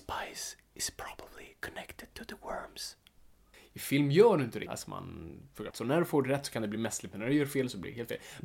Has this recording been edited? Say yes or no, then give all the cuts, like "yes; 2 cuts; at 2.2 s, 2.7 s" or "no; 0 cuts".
yes; 3 cuts; at 3.5 s, 4.7 s, 5.7 s